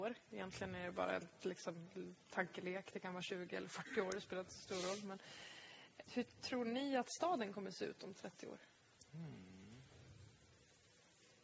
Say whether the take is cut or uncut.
cut